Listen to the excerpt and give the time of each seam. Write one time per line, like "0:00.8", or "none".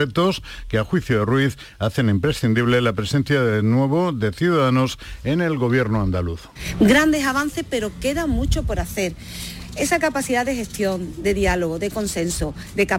none